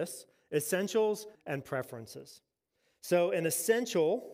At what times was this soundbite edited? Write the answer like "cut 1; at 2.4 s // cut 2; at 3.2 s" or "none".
cut 1; at 1.3 s

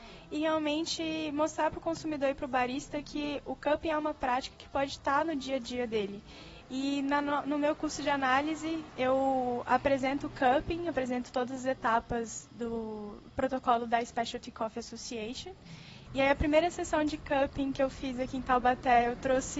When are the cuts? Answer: cut 1; at 6.6 s // cut 2; at 16.1 s

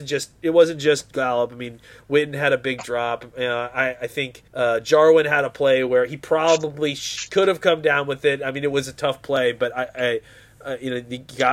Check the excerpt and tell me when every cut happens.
cut 1; at 4.5 s

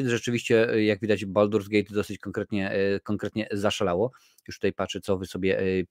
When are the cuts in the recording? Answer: none

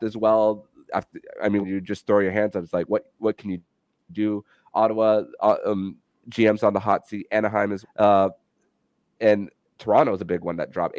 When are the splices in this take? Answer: cut 1; at 1.6 s // cut 2; at 7.8 s

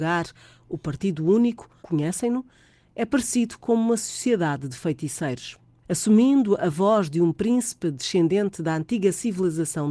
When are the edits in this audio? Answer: cut 1; at 1.8 s // cut 2; at 5.8 s

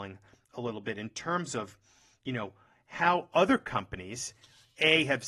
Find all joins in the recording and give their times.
none

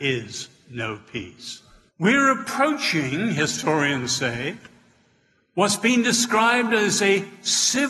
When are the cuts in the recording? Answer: cut 1; at 1.9 s

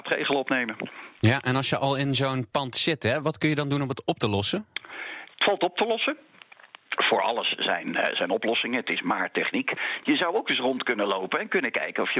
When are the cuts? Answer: cut 1; at 10.0 s

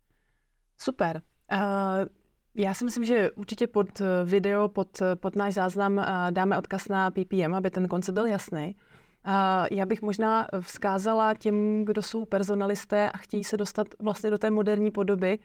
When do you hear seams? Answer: none

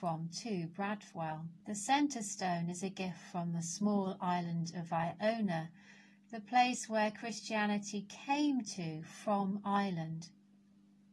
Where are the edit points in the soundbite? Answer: cut 1; at 1.6 s

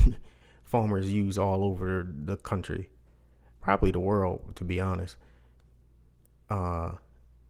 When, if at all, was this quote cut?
none

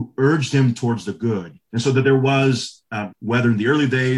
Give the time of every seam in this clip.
cut 1; at 1.7 s // cut 2; at 3.1 s

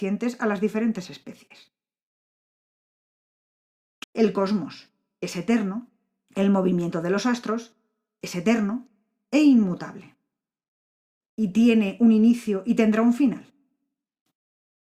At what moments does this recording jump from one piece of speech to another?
cut 1; at 4.0 s // cut 2; at 11.2 s

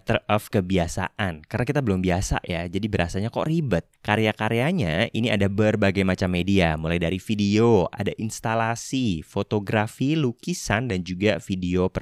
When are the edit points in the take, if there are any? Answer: cut 1; at 3.9 s

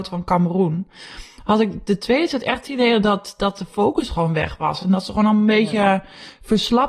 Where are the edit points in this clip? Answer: none

